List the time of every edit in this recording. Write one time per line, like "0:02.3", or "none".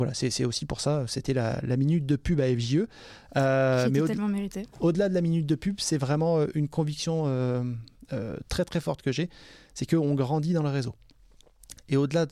none